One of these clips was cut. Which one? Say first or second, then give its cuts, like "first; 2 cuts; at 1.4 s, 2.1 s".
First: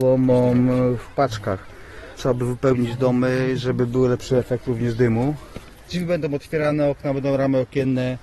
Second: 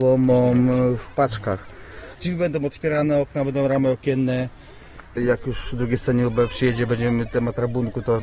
second; 1 cut; at 2.1 s